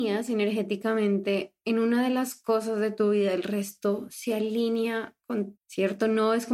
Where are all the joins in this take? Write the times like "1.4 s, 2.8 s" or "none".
5.6 s